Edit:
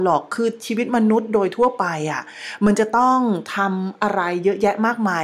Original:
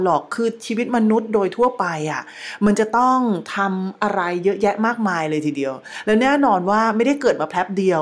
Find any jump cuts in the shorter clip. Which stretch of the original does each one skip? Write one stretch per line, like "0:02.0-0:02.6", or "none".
none